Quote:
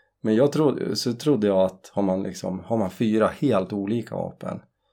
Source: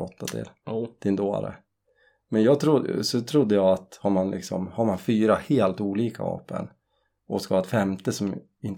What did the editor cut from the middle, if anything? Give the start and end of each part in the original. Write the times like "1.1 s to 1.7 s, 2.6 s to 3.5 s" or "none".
none